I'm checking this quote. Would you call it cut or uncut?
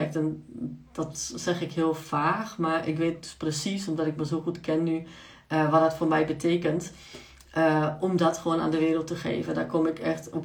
uncut